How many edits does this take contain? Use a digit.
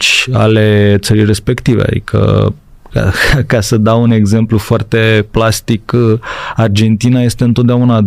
0